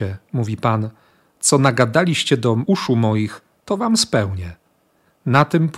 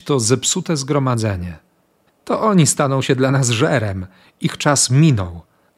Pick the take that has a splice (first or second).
second